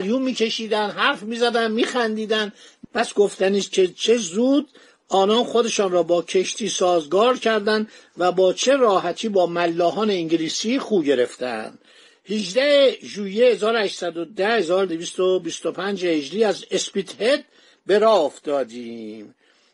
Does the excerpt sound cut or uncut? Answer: uncut